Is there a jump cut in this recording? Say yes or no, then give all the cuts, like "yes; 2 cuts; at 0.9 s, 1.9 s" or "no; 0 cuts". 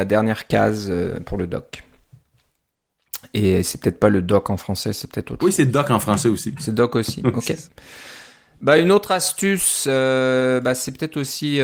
no; 0 cuts